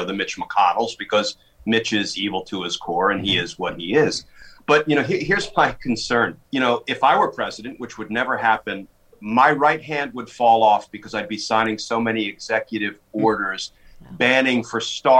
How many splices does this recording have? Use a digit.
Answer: 1